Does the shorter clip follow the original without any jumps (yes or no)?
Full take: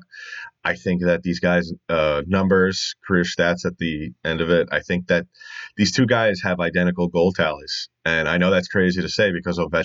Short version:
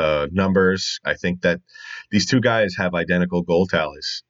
no